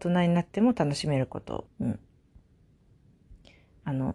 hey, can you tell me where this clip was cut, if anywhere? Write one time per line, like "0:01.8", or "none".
0:01.7